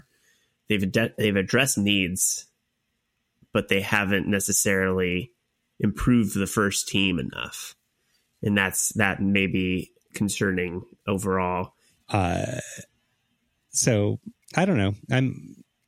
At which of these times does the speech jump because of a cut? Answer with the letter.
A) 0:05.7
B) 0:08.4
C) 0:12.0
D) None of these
C